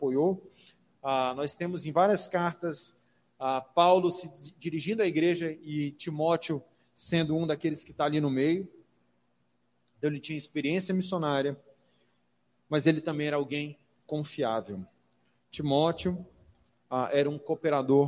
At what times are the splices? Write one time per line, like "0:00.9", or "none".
none